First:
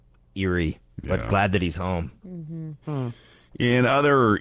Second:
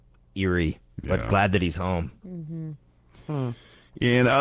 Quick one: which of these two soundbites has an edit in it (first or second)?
first